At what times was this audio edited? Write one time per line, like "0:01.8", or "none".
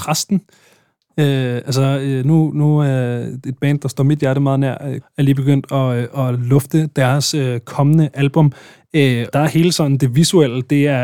0:05.0
0:09.3